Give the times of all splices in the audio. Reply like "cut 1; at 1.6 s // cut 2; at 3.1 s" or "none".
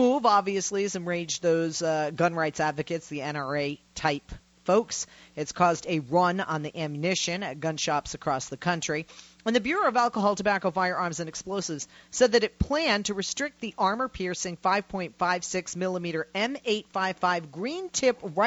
none

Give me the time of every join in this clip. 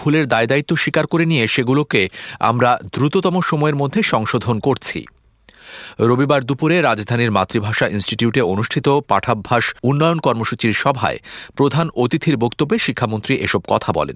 cut 1; at 9.8 s

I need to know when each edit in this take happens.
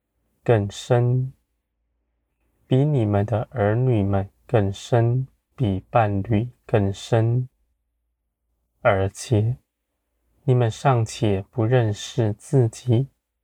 cut 1; at 5.5 s

